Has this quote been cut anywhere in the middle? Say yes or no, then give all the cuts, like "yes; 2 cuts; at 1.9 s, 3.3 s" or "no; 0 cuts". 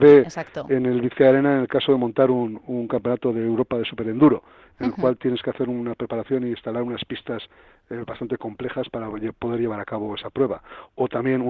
no; 0 cuts